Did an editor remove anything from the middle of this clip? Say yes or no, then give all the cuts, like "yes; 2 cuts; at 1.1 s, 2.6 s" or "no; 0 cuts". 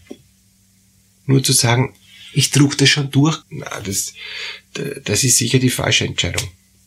yes; 1 cut; at 3.4 s